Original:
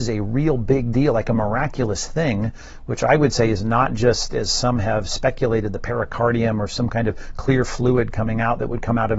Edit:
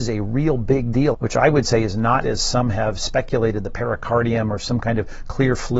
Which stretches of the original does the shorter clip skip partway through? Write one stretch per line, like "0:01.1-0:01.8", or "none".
0:01.1-0:02.8
0:03.9-0:04.3